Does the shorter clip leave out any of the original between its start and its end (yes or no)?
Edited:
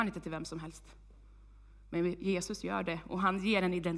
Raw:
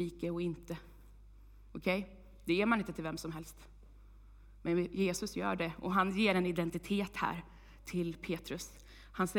no